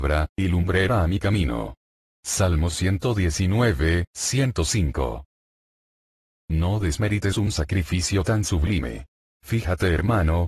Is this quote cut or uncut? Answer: cut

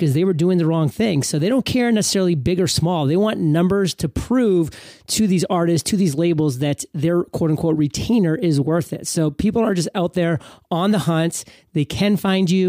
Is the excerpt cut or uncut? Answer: uncut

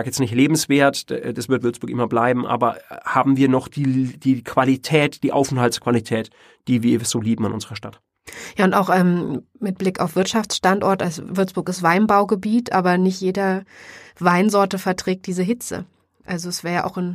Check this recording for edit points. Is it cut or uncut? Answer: uncut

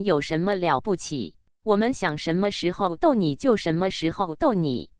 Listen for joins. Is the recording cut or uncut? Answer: cut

